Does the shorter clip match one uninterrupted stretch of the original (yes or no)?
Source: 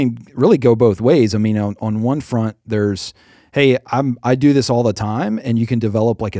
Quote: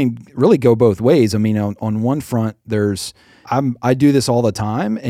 no